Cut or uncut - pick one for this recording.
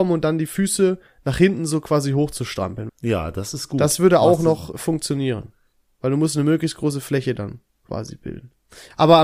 cut